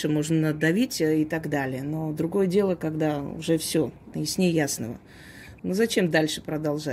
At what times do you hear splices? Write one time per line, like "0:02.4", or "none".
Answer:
0:04.1
0:05.6